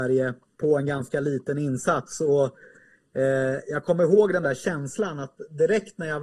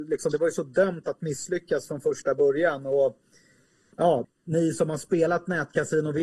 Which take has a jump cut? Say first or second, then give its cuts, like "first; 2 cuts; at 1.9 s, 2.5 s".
second; 1 cut; at 4.2 s